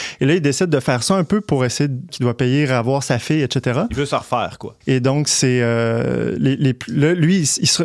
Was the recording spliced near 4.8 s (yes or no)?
yes